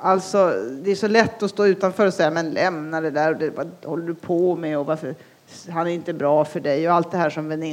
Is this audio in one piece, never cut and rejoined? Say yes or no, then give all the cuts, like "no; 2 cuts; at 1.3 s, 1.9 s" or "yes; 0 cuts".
yes; 0 cuts